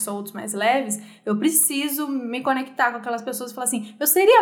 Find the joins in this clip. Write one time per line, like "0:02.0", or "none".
none

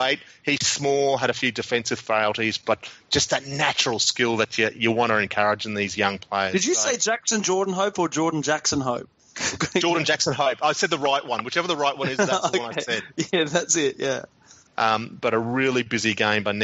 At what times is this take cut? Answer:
0:14.7

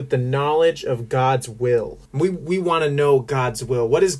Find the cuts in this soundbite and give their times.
0:02.1

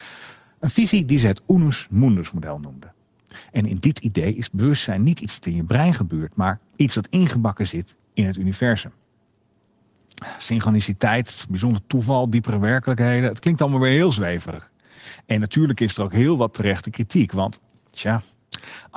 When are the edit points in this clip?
none

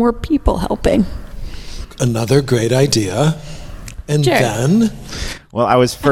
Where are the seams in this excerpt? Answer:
none

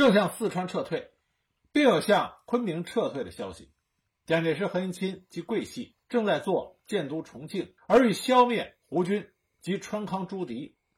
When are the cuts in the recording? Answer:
0:06.0
0:07.8

